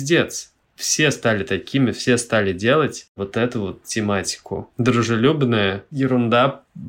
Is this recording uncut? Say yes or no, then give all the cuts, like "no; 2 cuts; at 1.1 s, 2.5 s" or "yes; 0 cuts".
yes; 0 cuts